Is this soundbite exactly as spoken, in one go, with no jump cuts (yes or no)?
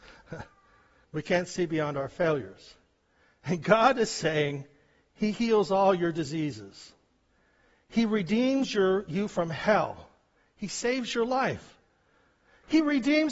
no